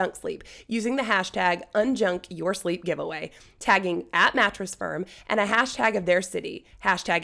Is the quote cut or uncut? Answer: uncut